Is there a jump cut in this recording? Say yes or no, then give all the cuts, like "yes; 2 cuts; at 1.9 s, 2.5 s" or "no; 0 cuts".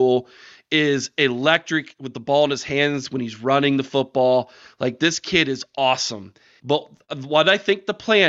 yes; 1 cut; at 6.6 s